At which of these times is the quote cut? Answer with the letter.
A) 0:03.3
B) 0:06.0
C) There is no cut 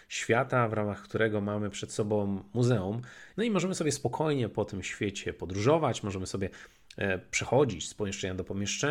A